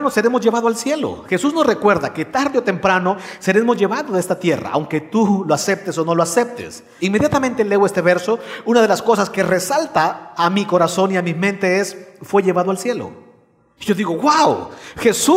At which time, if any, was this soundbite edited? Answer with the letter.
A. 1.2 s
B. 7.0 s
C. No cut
B